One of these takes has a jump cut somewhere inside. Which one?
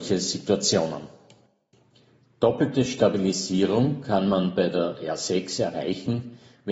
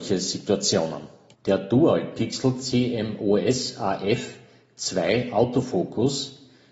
second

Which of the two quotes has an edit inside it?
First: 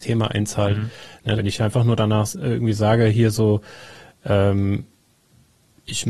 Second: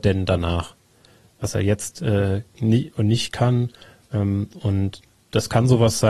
first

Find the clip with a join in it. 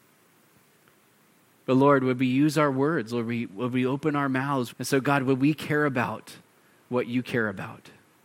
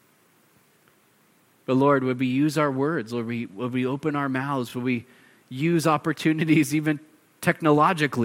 first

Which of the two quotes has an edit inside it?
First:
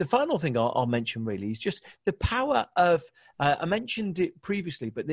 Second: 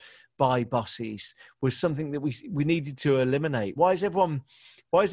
second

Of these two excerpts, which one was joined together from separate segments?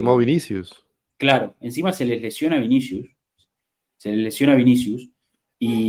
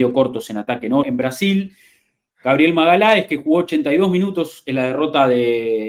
second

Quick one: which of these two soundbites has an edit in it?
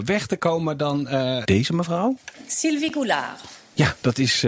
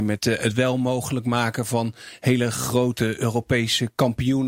first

